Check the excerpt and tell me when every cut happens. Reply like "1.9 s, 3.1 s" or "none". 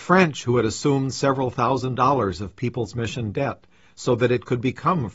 none